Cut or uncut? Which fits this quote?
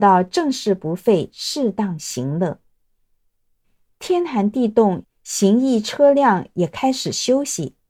cut